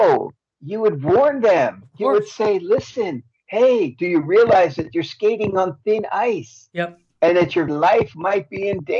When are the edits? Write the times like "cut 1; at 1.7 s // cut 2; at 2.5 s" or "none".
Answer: cut 1; at 7.7 s